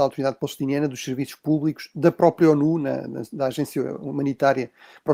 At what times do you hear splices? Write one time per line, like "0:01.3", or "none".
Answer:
none